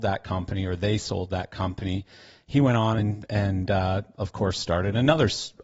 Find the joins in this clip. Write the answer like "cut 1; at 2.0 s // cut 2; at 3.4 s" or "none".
none